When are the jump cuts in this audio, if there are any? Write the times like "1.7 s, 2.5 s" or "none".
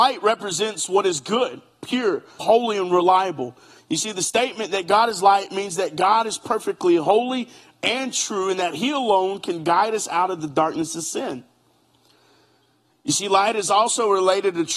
2.4 s, 3.8 s